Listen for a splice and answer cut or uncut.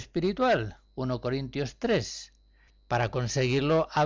cut